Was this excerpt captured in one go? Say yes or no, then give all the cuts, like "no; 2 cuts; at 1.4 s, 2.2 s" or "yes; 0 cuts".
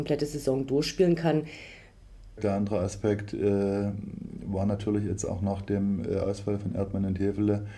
no; 1 cut; at 2.4 s